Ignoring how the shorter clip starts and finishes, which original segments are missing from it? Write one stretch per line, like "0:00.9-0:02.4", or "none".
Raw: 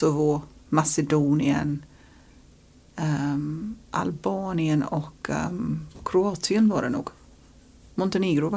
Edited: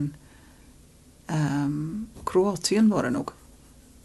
0:03.8-0:05.9